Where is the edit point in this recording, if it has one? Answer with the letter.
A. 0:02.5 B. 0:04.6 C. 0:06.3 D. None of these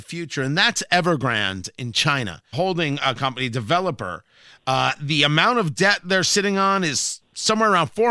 A